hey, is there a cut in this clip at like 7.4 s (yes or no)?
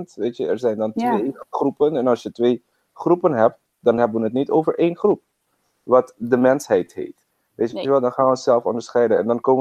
no